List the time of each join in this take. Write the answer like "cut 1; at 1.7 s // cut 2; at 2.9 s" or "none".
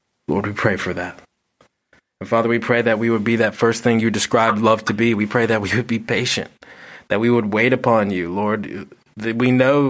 none